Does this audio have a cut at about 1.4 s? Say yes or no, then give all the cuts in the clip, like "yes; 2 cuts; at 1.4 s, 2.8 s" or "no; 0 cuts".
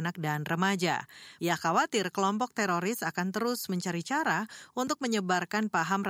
yes; 1 cut; at 1.4 s